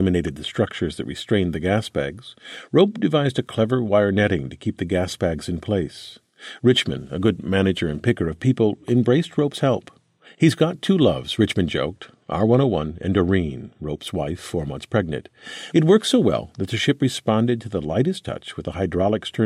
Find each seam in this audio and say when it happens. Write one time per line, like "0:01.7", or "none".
0:15.7